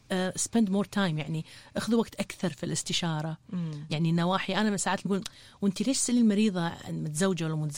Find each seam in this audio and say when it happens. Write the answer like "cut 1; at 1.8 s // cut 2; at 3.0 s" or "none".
cut 1; at 3.9 s // cut 2; at 5.1 s